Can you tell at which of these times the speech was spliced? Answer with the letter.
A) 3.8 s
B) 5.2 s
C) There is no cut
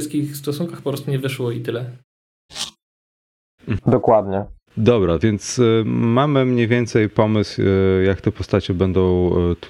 A